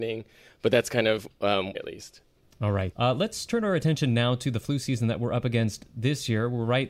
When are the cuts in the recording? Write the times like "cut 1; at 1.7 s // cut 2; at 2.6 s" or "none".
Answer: cut 1; at 1.7 s // cut 2; at 2.9 s